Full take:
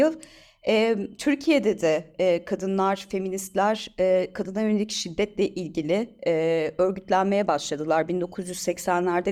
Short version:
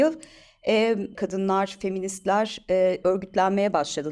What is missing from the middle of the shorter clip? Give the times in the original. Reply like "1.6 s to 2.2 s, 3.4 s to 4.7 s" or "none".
1.1 s to 2.4 s, 4.3 s to 6.8 s